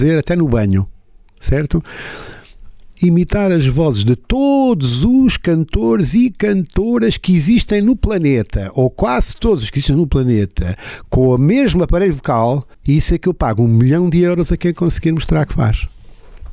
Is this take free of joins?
no; 1 cut; at 12.7 s

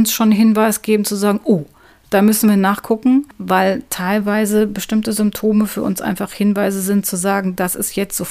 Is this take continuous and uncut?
yes; 0 cuts

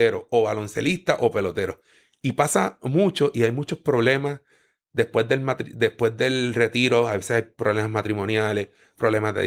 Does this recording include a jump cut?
no; 0 cuts

